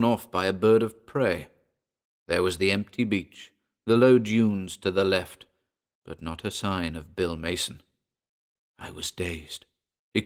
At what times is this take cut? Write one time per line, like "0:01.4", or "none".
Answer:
none